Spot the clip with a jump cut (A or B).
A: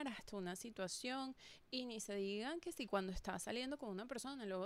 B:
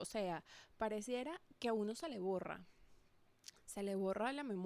B